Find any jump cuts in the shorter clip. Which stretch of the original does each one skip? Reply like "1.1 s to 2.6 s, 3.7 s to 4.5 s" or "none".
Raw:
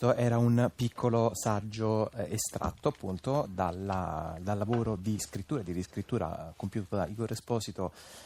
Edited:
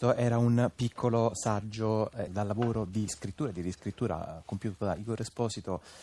2.3 s to 4.4 s

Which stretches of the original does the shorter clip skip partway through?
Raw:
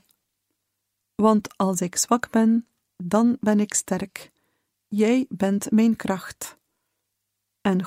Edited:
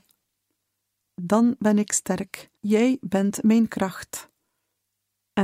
1.1 s to 2.9 s, 4.4 s to 4.8 s

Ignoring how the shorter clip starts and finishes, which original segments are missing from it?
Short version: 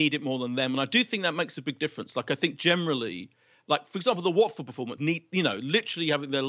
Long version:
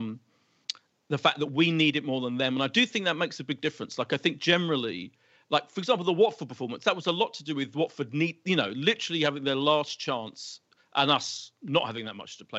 6.8 s to 8.1 s

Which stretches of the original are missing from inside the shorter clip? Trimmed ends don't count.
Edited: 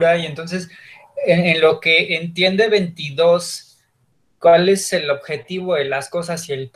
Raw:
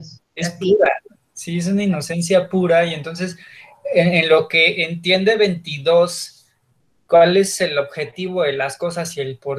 none

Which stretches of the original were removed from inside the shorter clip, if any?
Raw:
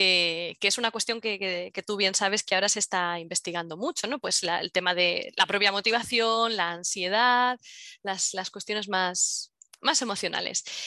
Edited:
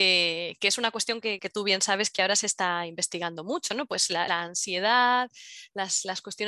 1.4 s to 1.7 s, 4.6 s to 6.6 s

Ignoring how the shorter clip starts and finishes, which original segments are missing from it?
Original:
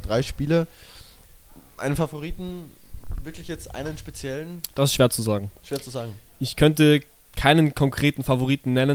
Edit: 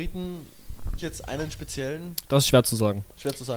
3.2 s to 3.4 s

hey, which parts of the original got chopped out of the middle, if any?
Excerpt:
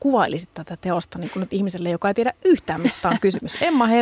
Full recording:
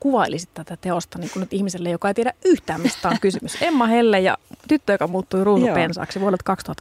none

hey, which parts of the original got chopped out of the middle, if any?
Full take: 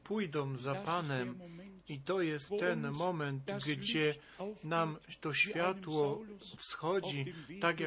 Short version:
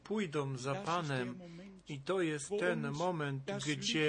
none

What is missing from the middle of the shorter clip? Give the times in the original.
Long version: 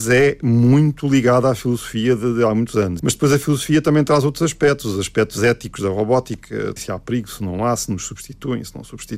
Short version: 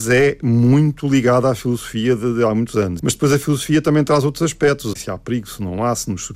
4.9 s to 6.7 s

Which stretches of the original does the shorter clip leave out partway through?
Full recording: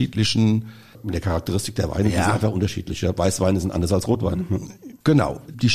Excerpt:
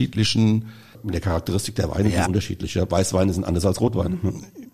2.2 s to 2.5 s

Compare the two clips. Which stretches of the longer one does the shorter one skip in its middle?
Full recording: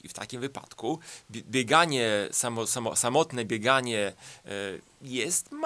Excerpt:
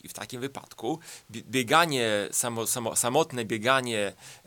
none

